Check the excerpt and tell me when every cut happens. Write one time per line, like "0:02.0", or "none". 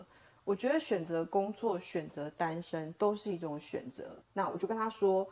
0:04.2